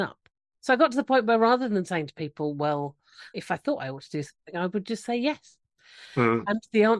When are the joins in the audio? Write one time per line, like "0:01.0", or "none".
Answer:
0:03.3